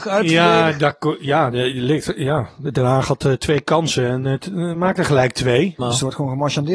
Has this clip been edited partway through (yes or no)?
yes